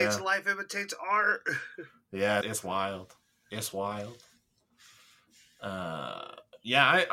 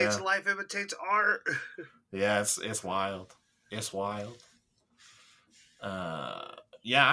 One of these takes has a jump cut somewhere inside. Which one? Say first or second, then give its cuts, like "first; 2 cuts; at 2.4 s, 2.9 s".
first; 1 cut; at 2.4 s